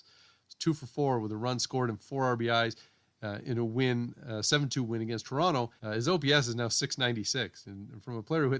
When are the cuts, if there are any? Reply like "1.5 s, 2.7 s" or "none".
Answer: 5.8 s

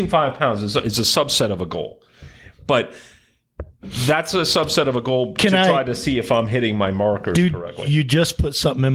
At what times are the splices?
none

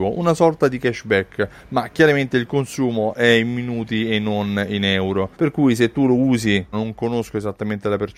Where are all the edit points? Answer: 5.3 s, 6.7 s

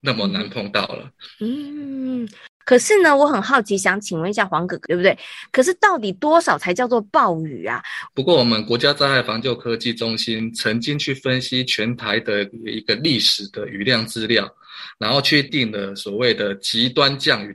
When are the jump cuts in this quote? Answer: 4.9 s, 8.1 s, 15.5 s

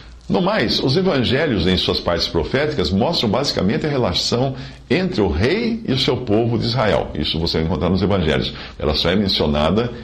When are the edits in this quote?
8.8 s

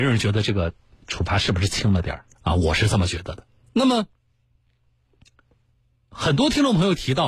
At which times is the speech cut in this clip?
2.3 s, 3.6 s

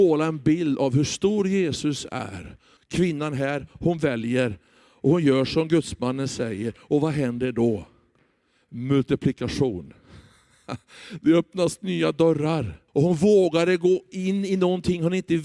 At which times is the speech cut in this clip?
2.8 s, 12.9 s

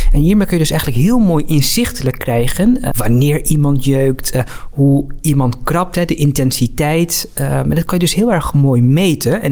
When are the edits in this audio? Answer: 2.9 s

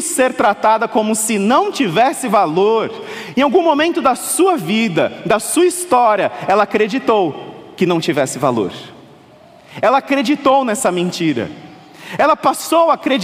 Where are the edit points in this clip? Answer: none

